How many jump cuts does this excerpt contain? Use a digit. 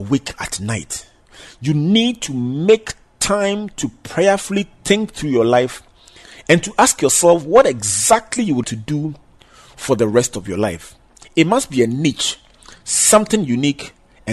1